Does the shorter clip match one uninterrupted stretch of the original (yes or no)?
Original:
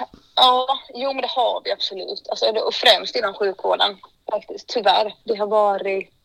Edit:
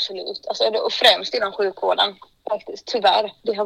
yes